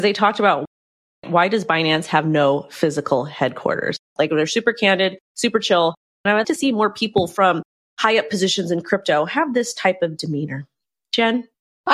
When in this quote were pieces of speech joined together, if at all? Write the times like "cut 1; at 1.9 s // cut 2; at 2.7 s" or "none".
cut 1; at 4.2 s // cut 2; at 6.4 s